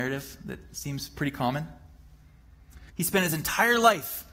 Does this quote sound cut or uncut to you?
cut